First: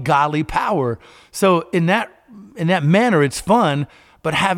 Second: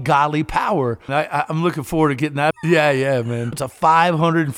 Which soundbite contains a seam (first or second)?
second